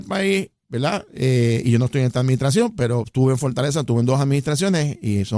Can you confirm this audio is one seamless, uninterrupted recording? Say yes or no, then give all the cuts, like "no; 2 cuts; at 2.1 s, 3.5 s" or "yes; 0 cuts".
yes; 0 cuts